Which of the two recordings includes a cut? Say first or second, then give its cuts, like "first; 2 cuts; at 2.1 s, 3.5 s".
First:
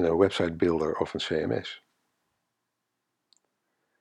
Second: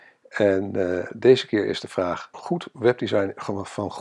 second; 1 cut; at 2.3 s